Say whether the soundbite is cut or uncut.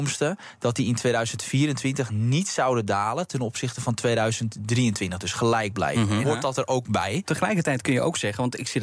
cut